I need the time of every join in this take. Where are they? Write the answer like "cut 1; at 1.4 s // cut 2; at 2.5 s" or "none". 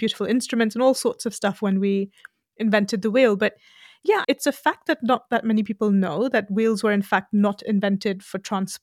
cut 1; at 4.2 s